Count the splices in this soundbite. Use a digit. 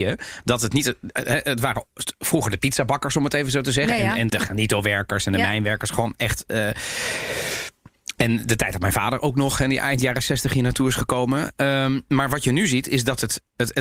1